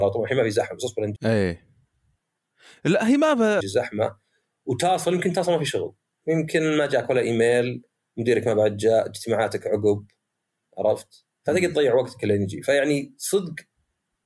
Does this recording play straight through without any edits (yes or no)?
no